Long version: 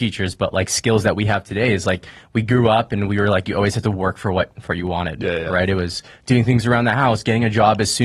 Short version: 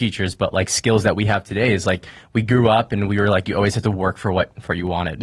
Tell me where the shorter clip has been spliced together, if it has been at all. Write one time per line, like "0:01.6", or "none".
none